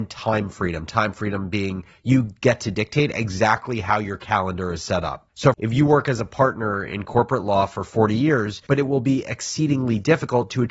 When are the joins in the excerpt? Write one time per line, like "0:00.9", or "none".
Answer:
0:05.5
0:08.7